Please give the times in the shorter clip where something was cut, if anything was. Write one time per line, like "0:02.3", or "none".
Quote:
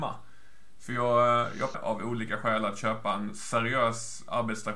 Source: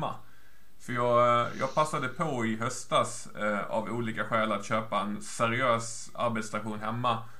0:01.7